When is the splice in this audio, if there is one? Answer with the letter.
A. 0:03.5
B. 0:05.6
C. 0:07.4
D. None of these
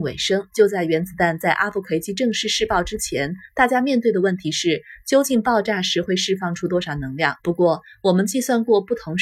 C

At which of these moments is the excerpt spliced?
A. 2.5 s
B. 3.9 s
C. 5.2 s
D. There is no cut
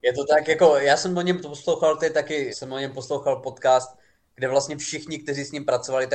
A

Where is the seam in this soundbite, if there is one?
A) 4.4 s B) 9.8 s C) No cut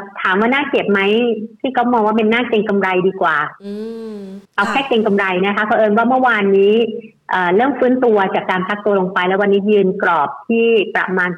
A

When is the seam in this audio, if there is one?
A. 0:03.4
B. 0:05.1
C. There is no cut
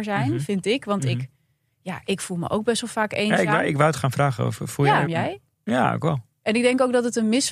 B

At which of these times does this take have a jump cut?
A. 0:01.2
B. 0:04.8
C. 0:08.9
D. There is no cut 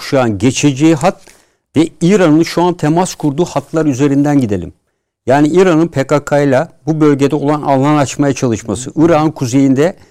D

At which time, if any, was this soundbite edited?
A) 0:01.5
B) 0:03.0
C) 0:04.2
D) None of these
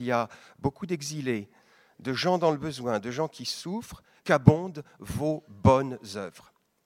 C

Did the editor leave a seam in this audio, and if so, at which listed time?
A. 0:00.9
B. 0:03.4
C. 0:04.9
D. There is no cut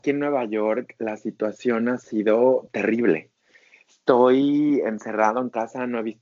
D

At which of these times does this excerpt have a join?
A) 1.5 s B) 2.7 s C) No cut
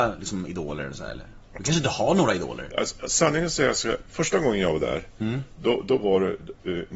B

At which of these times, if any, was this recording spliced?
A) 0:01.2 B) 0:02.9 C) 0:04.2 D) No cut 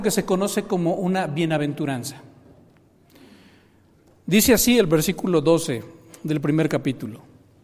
D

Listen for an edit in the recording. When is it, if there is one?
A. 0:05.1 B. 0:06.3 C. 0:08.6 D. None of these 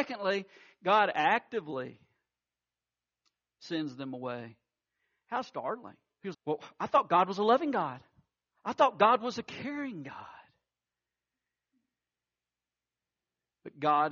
B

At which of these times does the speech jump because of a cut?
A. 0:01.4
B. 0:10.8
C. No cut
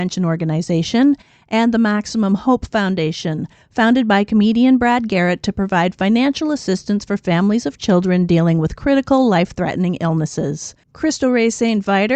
B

